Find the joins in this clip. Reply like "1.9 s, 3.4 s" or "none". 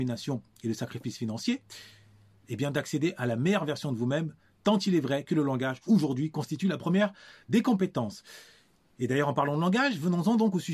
none

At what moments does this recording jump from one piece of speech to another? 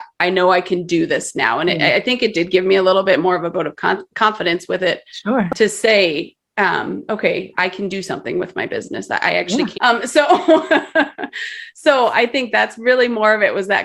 7.5 s, 9.7 s

